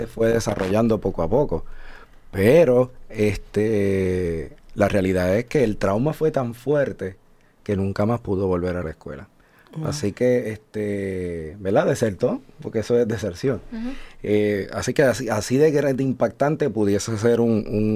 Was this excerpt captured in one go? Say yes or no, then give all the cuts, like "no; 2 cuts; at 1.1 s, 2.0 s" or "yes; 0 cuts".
yes; 0 cuts